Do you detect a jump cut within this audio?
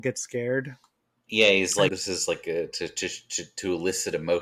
yes; 1 cut; at 1.9 s

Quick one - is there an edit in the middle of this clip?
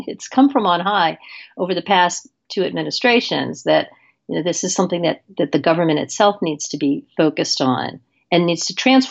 no; 0 cuts

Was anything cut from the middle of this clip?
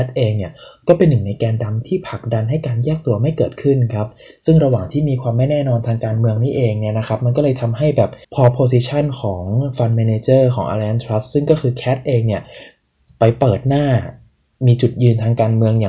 yes; 1 cut; at 8.2 s

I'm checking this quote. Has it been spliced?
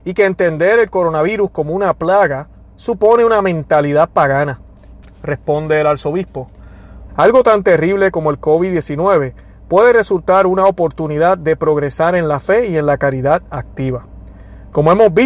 yes; 2 cuts; at 5.0 s, 7.1 s

